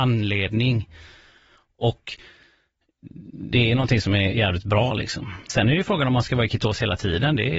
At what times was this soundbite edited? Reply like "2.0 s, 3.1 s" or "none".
5.5 s

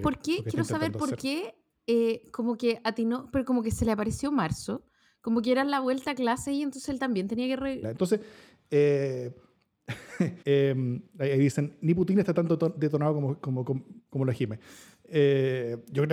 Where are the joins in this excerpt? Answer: 7.8 s, 10.4 s

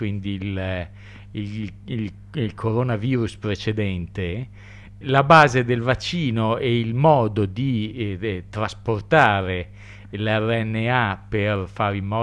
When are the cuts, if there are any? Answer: 5.0 s

